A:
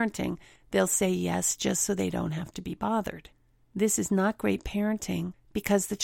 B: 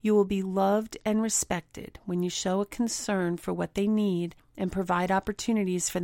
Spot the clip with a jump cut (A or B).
A